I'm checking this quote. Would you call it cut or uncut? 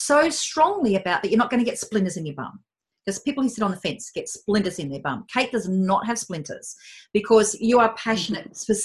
uncut